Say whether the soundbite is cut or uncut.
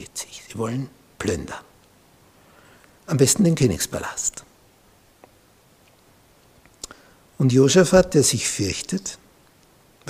uncut